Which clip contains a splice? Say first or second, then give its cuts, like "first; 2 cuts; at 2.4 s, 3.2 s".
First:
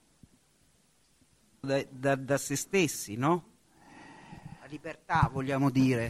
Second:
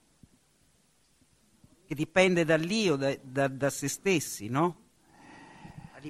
first; 1 cut; at 1.6 s